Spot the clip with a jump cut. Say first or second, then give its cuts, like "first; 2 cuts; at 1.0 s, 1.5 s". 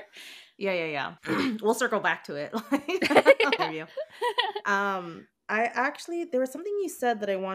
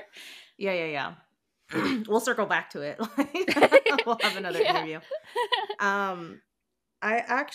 first; 3 cuts; at 1.2 s, 3.6 s, 5.4 s